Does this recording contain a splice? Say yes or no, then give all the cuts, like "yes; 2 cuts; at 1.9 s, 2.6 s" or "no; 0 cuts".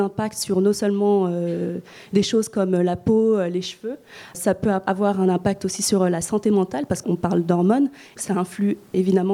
no; 0 cuts